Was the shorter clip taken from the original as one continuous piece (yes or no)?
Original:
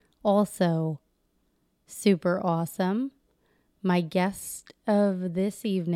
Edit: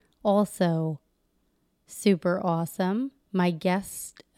no